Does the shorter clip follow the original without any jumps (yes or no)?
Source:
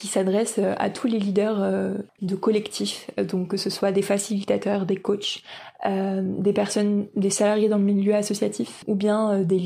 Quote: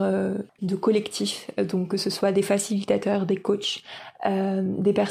yes